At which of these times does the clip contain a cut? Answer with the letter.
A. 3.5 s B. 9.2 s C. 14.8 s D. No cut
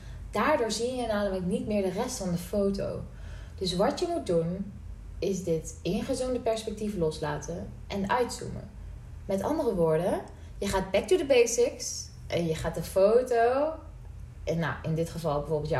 D